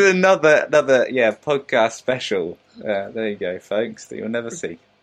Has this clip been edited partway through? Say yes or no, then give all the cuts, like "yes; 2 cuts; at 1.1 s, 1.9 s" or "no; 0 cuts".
no; 0 cuts